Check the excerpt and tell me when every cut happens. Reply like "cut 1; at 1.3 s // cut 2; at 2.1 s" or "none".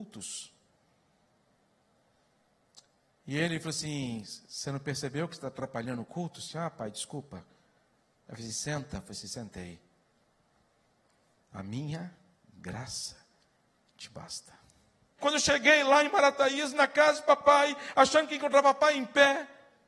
cut 1; at 11.4 s // cut 2; at 15.2 s